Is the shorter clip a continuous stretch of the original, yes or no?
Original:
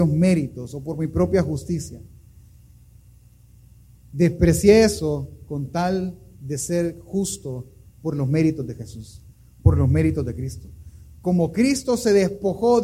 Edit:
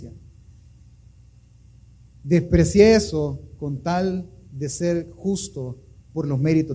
yes